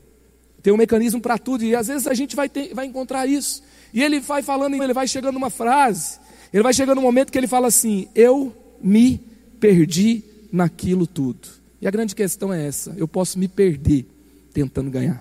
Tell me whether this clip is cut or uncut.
cut